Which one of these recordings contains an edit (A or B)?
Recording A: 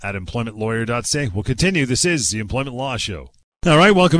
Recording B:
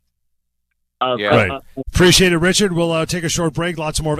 B